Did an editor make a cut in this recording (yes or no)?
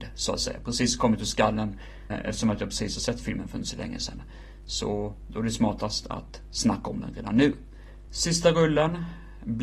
yes